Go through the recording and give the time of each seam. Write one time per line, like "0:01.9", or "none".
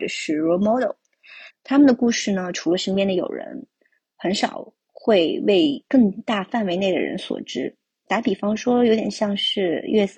0:01.5